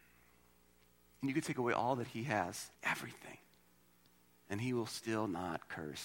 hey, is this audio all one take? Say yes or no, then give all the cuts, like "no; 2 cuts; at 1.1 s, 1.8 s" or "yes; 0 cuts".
no; 1 cut; at 2.7 s